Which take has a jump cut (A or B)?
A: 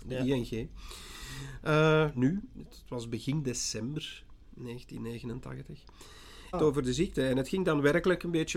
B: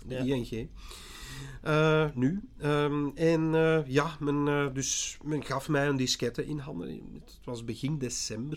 A